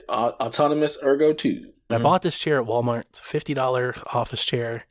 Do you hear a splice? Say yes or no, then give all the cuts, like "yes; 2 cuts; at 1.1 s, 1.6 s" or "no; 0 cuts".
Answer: yes; 1 cut; at 1.9 s